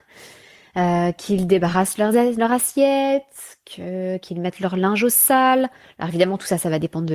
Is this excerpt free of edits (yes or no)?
yes